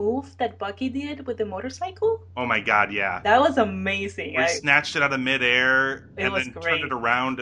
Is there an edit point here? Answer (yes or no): no